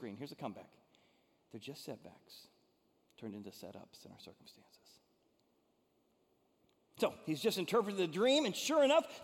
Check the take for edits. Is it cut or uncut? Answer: uncut